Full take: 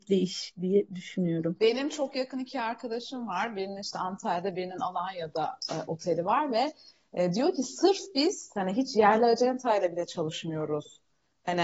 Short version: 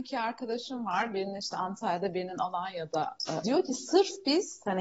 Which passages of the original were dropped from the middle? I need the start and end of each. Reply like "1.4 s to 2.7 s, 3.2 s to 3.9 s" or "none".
5.9 s to 7.3 s